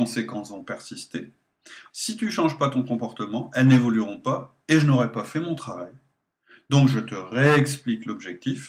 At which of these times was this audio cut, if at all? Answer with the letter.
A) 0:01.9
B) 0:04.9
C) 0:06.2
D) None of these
A